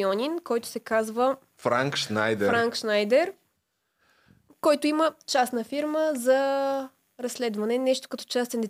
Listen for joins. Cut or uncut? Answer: uncut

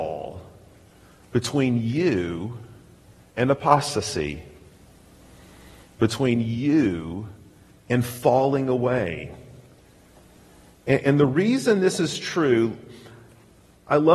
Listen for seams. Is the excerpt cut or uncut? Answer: uncut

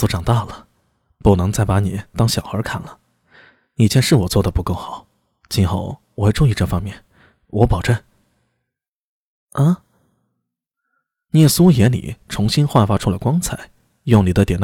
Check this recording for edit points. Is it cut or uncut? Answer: uncut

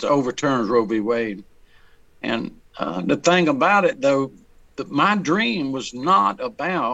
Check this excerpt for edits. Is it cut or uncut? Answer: uncut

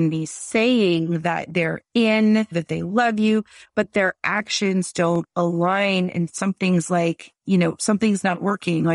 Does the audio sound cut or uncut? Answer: cut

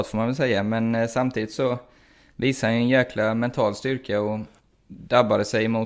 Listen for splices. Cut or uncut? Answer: uncut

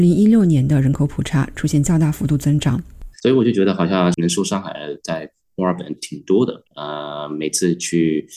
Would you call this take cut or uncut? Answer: cut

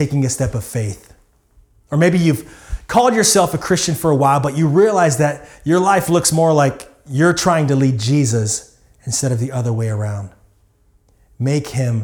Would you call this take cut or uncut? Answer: uncut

